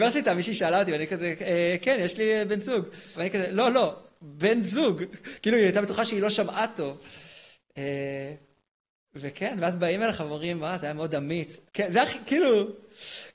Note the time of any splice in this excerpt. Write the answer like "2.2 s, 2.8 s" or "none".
3.1 s, 11.7 s